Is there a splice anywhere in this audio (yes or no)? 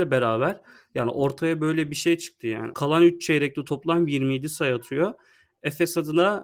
yes